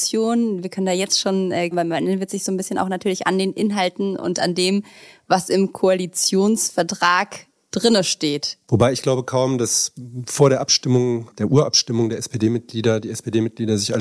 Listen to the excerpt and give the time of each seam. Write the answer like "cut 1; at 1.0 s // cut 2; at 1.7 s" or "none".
cut 1; at 1.7 s